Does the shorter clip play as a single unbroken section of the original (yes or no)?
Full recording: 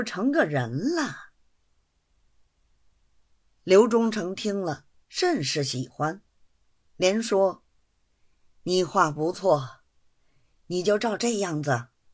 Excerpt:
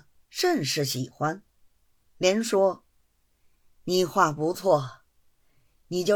yes